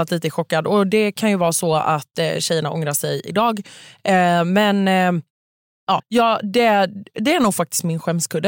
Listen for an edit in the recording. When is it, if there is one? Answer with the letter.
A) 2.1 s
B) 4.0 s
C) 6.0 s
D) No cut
C